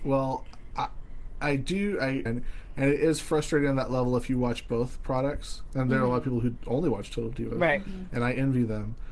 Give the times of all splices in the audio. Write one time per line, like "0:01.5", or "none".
0:02.3